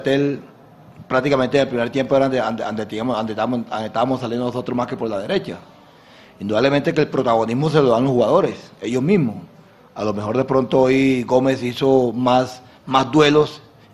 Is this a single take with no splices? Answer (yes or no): yes